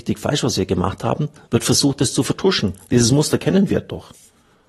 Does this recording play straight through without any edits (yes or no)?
yes